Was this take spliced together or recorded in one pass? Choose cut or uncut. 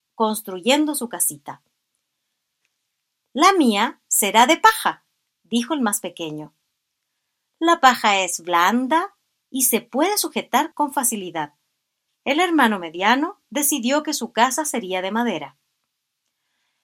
cut